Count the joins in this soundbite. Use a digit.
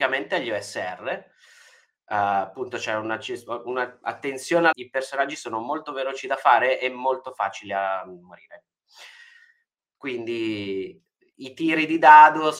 1